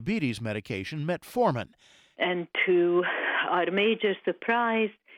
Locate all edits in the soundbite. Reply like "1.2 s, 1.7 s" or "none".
2.1 s